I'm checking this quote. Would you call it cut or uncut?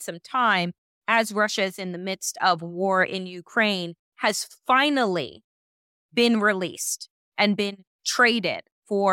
uncut